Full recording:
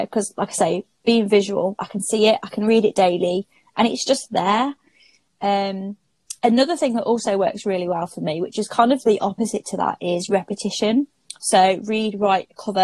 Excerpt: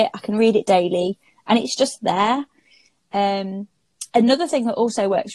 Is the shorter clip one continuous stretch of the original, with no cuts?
yes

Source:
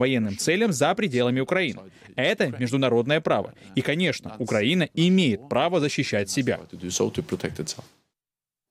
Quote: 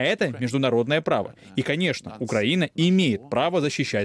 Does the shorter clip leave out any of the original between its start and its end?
no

